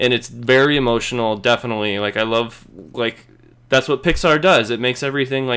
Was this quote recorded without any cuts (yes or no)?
yes